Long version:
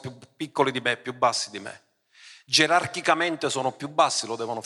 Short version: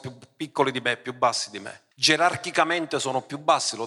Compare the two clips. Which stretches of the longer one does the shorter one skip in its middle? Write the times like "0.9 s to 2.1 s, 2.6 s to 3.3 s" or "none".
1.9 s to 2.4 s